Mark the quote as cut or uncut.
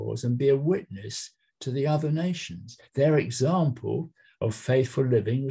uncut